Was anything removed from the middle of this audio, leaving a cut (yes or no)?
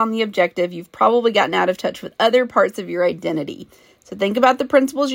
no